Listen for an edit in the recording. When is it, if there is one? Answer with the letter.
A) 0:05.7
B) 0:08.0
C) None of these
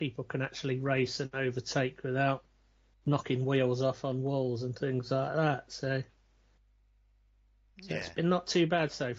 C